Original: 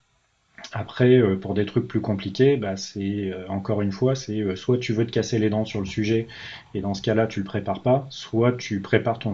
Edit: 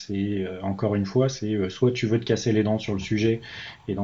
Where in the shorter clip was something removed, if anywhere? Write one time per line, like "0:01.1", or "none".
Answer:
none